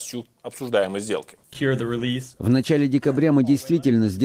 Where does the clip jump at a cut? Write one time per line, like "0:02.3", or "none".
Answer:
0:01.4